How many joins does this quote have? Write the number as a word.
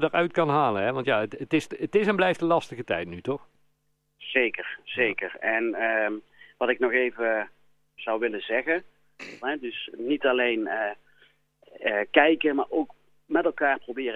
one